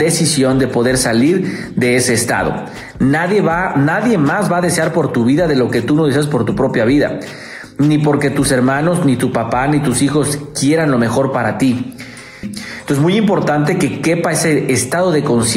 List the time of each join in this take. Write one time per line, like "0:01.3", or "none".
0:12.4